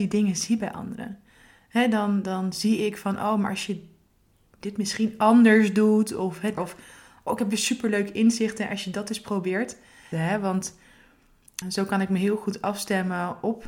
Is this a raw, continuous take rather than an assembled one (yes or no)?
no